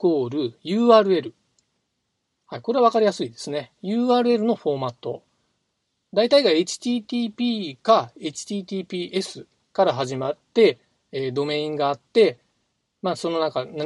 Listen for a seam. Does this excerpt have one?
no; 0 cuts

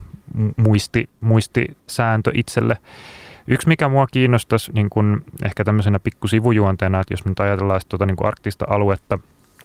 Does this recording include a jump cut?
no; 0 cuts

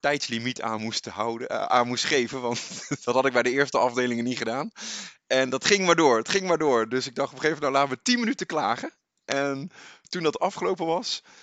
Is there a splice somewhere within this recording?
no; 0 cuts

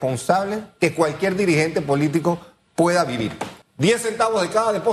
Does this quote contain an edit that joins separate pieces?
yes; 1 cut; at 3.6 s

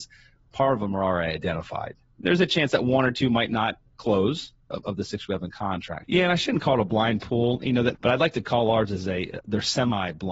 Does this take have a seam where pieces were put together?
yes; 3 cuts; at 6.0 s, 7.9 s, 9.4 s

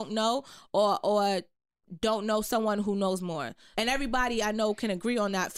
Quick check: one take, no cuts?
no; 1 cut; at 3.7 s

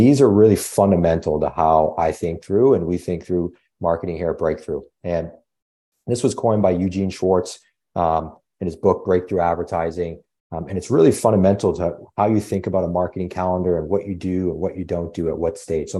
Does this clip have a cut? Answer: no; 0 cuts

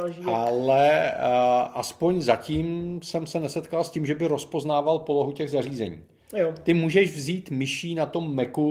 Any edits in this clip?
no; 0 cuts

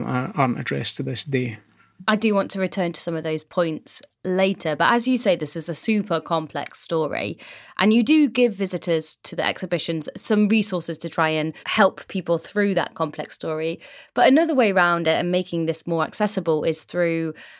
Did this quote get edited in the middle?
no; 0 cuts

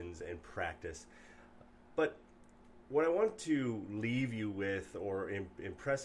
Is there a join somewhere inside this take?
no; 0 cuts

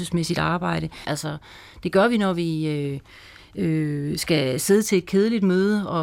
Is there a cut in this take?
yes; 1 cut; at 1.0 s

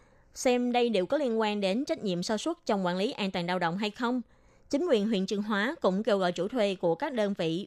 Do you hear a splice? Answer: no; 0 cuts

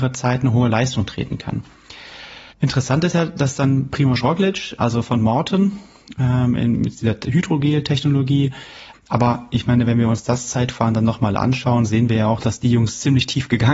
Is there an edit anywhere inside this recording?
yes; 3 cuts; at 2.5 s, 4.8 s, 8.9 s

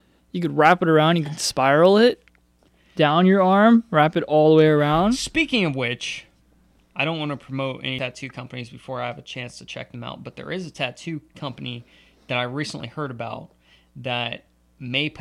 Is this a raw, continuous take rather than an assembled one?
no; 1 cut; at 11.3 s

